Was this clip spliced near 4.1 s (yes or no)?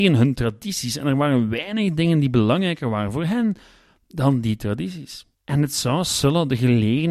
no